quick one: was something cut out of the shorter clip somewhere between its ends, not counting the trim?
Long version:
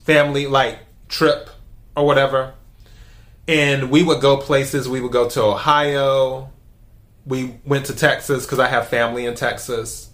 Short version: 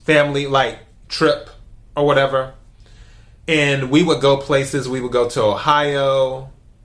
no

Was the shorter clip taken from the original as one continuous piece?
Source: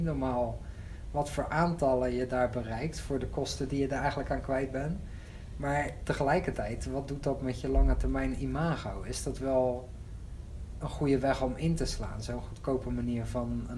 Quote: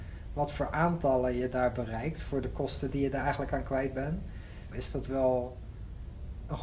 no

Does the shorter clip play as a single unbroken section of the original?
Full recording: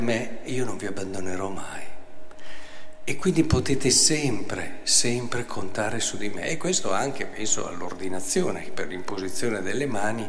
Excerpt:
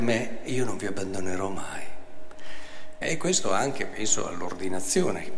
no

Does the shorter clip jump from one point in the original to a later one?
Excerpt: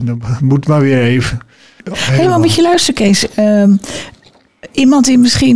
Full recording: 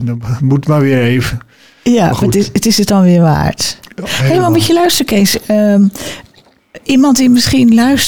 yes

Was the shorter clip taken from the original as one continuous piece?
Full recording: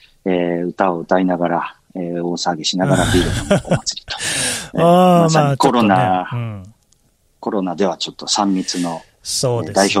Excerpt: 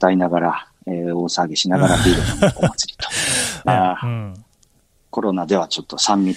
no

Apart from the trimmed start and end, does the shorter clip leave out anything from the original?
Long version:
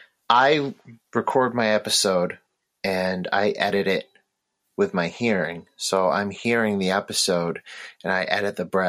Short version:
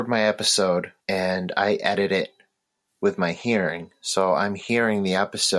yes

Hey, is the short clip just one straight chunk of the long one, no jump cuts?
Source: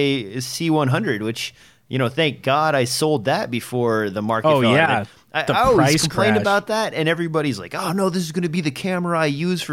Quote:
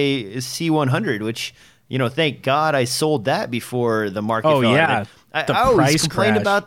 yes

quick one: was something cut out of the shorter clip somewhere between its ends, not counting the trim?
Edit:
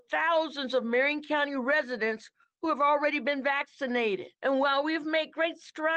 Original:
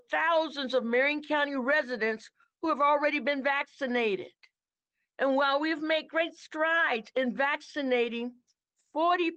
yes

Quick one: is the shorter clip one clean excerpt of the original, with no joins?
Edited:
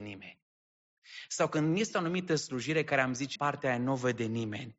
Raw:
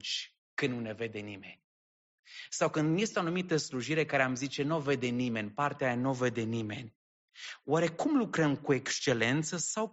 no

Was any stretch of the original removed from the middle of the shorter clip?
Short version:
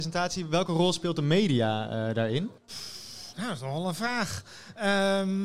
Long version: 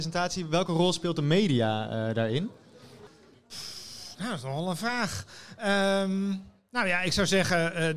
yes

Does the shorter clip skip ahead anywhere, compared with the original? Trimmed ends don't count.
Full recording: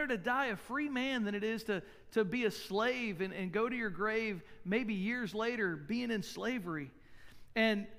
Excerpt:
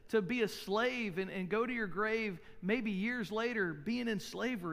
no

